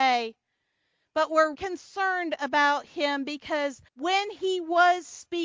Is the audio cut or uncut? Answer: cut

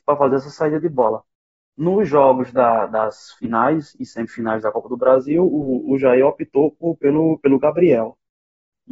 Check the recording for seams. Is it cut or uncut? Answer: uncut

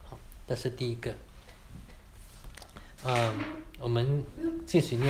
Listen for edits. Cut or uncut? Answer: cut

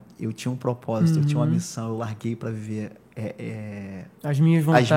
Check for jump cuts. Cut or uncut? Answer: uncut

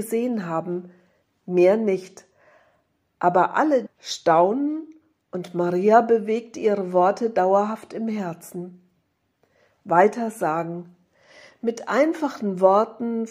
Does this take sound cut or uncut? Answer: cut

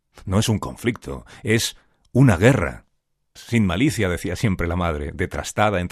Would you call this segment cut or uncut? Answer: cut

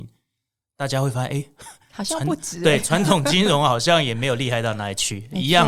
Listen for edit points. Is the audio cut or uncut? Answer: uncut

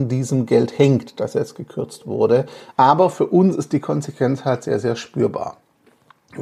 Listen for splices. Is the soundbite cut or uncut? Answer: cut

